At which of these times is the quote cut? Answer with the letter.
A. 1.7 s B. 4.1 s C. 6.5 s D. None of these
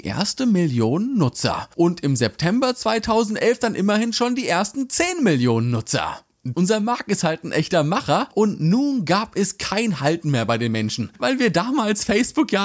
C